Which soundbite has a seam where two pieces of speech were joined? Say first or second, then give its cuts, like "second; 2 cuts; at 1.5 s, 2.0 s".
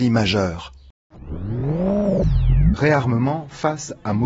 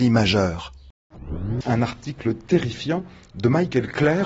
second; 1 cut; at 1.6 s